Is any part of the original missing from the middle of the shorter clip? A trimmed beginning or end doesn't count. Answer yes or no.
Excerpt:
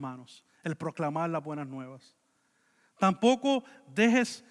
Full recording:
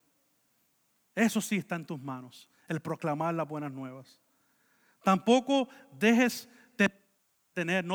no